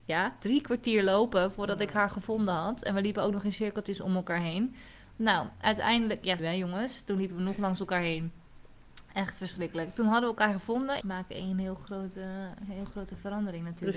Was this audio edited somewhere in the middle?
yes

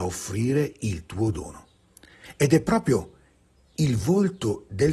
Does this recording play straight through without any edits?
yes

